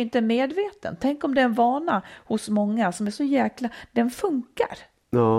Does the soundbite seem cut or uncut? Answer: uncut